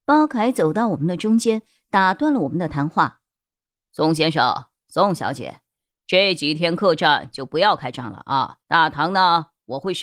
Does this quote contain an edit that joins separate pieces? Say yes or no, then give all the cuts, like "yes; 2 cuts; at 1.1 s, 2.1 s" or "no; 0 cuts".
yes; 1 cut; at 8.6 s